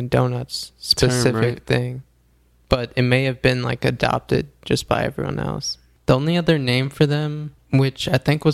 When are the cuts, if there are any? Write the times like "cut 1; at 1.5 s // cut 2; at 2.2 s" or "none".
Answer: none